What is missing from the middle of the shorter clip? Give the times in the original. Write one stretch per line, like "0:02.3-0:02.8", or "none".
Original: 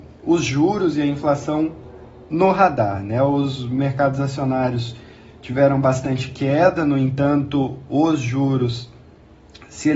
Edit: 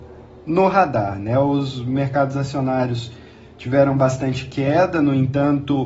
none